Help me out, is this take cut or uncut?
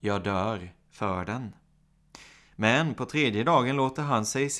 uncut